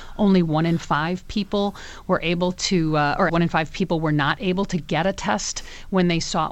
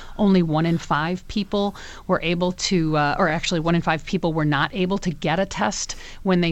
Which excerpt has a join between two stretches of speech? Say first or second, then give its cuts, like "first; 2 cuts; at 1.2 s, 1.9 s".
first; 1 cut; at 3.3 s